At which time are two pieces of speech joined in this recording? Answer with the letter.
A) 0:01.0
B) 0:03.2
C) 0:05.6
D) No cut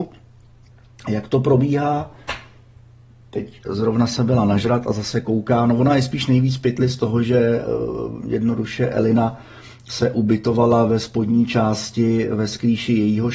D